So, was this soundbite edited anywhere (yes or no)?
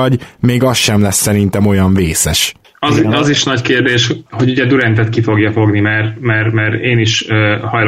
no